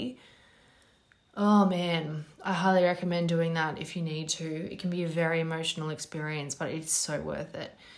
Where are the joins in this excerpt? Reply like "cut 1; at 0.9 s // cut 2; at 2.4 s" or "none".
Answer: none

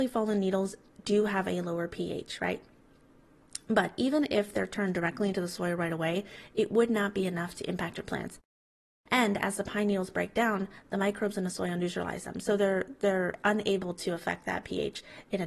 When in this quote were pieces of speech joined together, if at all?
none

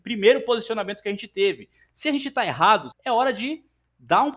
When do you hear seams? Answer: cut 1; at 2.9 s

